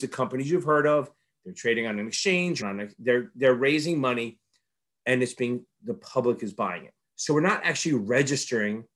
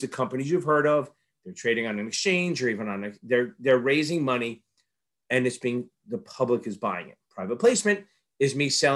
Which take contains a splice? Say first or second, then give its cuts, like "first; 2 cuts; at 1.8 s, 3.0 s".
first; 2 cuts; at 2.6 s, 7.0 s